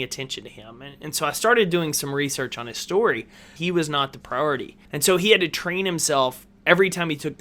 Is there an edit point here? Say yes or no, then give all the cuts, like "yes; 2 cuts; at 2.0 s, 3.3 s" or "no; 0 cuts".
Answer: yes; 2 cuts; at 3.6 s, 4.8 s